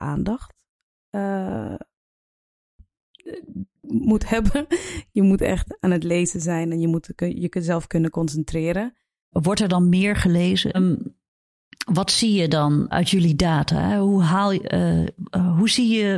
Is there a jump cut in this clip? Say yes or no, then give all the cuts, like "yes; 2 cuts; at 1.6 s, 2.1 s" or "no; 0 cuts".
yes; 3 cuts; at 9.3 s, 10.7 s, 12.9 s